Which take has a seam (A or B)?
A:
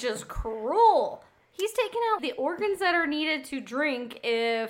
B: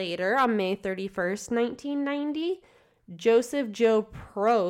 A